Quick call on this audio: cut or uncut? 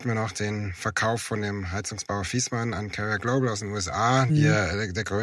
cut